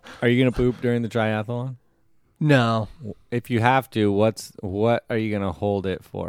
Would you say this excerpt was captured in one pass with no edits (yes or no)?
yes